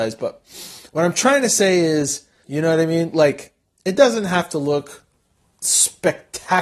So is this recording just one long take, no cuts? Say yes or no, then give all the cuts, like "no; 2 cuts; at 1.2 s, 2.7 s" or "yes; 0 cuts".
no; 1 cut; at 2.4 s